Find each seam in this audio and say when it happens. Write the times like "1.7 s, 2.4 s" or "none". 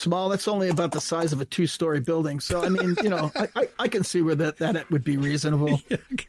3.7 s